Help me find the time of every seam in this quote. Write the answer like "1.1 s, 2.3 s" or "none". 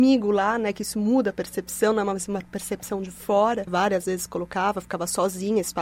3.7 s